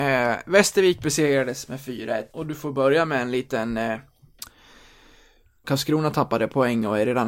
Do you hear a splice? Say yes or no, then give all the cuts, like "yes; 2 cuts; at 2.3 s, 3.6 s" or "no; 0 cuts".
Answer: yes; 2 cuts; at 2.3 s, 5.6 s